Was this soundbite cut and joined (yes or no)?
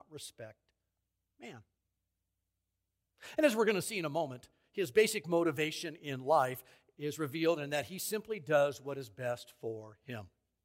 no